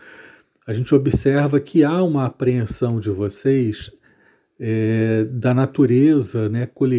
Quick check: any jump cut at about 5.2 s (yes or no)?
no